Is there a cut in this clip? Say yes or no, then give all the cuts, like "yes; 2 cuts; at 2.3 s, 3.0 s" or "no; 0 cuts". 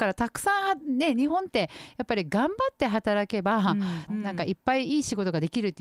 yes; 1 cut; at 4.1 s